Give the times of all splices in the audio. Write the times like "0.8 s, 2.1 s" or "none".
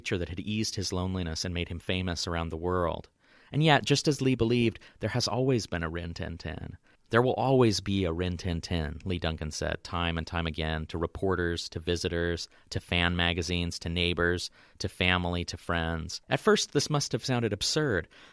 7.0 s, 16.2 s